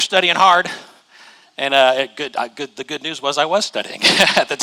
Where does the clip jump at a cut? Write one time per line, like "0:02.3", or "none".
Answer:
none